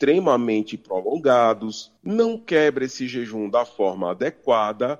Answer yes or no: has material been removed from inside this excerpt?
yes